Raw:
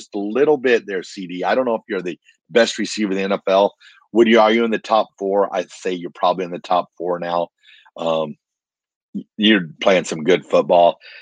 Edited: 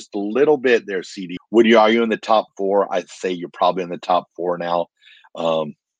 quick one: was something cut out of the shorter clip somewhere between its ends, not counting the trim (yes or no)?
yes